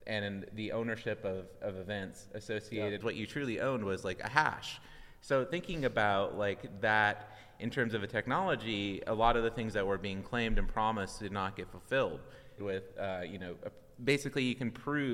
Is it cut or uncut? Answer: cut